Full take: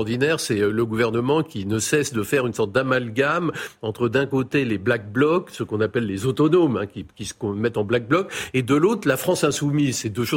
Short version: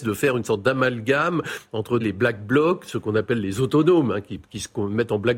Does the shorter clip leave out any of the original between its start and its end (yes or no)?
yes